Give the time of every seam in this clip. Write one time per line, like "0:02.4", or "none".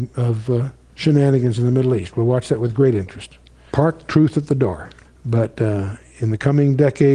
0:03.7
0:05.0